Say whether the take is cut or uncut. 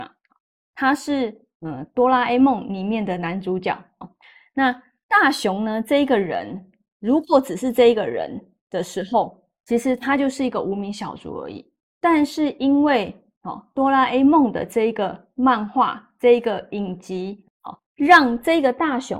cut